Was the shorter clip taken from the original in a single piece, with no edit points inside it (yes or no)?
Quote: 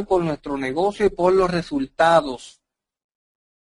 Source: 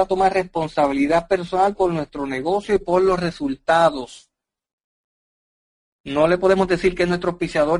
yes